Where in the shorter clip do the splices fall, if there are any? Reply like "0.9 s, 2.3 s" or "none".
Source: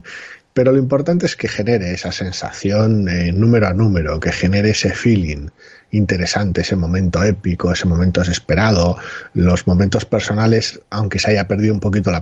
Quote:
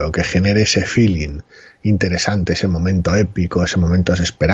none

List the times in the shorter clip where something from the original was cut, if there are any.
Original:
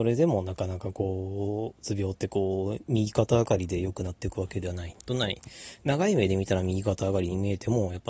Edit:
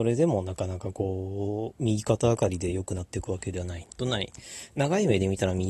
1.8 s

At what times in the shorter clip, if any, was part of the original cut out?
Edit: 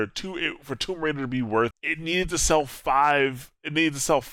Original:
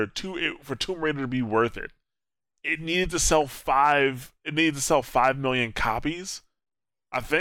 1.7 s

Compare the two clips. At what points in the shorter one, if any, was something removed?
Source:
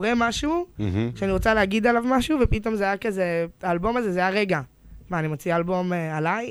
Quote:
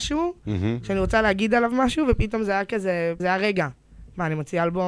3.2 s

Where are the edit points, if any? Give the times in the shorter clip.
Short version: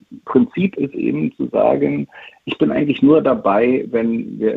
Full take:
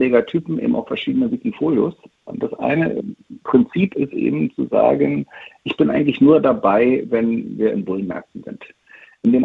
none

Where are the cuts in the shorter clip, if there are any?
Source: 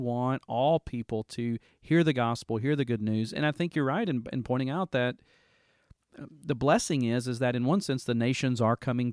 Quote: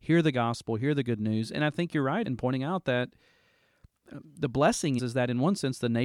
2.2 s, 5.0 s

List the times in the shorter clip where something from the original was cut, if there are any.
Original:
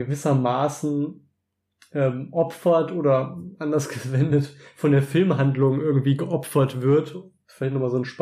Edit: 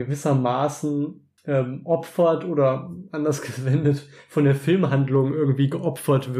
1.4 s

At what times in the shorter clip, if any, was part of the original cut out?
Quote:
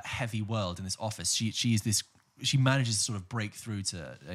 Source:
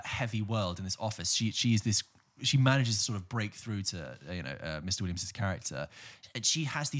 none

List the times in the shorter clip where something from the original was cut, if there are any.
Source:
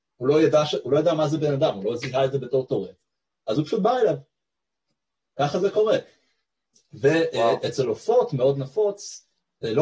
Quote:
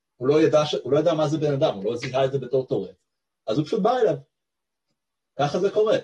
none

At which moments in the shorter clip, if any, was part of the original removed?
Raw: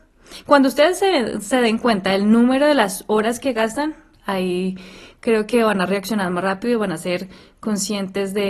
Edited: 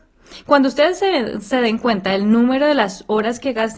none

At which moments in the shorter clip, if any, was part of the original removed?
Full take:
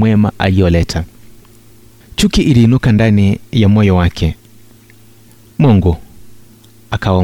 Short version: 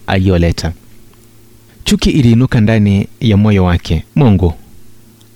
4.1 s

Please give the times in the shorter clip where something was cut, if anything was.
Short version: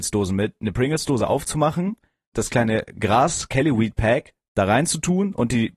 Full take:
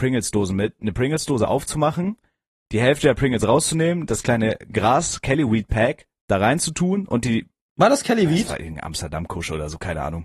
2.3 s

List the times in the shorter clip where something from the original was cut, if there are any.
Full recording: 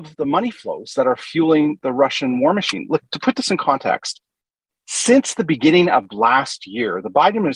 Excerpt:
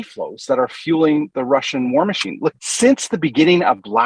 2.6 s

